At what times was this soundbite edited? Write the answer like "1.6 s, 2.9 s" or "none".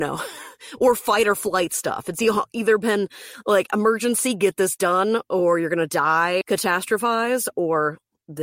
6.4 s